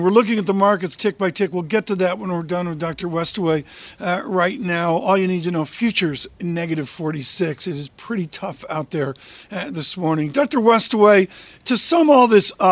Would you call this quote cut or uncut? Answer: uncut